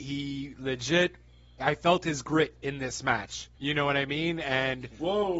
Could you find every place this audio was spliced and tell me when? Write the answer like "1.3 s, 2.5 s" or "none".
1.6 s, 3.6 s

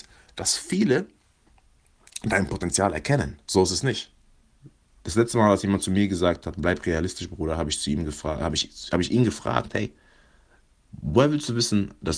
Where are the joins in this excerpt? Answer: 3.4 s, 4.9 s

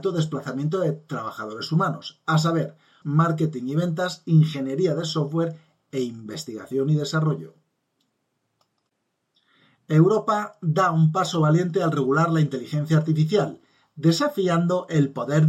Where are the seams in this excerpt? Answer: 3.0 s

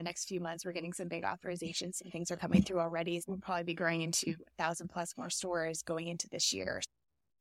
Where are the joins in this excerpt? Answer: none

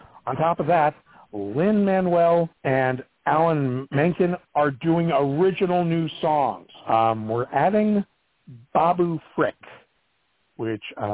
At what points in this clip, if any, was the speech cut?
2.6 s, 6.8 s

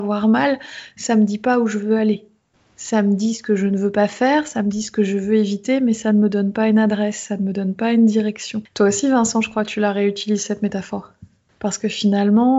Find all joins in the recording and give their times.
8.7 s, 11.6 s

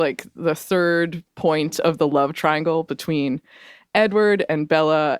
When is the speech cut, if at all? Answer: none

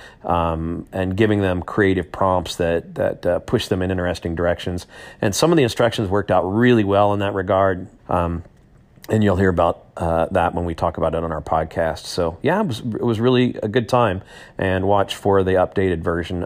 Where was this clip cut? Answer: 8.0 s

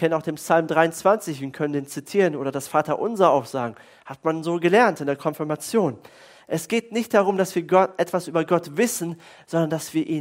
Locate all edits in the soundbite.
6.4 s

